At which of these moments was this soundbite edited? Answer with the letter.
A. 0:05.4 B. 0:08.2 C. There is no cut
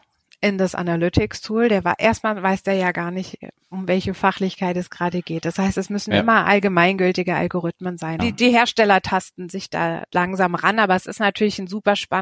B